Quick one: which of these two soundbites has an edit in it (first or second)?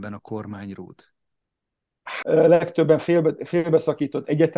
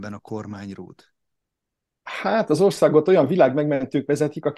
first